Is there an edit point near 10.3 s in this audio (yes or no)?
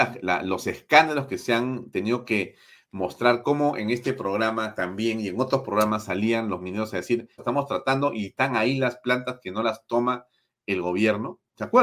no